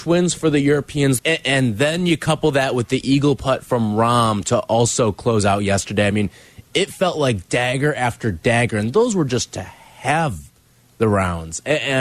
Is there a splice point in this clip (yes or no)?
yes